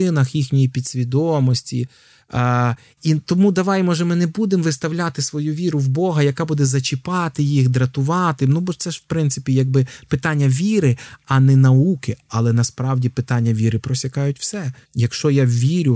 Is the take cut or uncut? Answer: cut